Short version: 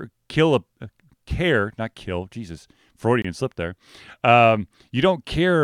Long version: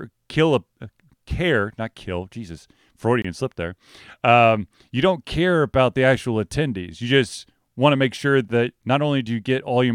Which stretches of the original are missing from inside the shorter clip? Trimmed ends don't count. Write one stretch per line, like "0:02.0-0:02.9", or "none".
none